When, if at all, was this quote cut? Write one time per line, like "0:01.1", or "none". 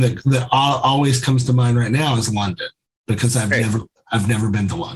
none